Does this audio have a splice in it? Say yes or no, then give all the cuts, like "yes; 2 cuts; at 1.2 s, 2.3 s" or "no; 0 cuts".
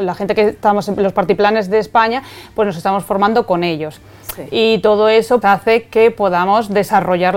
yes; 1 cut; at 5.4 s